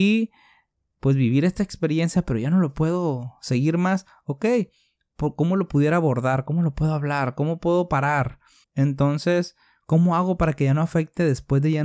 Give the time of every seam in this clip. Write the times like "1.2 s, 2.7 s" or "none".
8.6 s